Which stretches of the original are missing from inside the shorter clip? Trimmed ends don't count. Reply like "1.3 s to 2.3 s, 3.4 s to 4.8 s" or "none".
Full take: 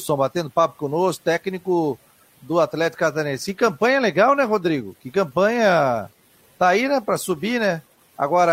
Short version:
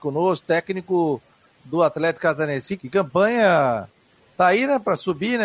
3.5 s to 5.0 s